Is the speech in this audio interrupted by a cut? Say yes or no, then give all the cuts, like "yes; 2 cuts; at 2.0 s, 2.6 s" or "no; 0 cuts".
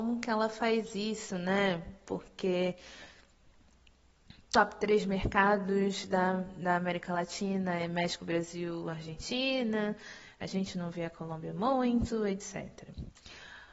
no; 0 cuts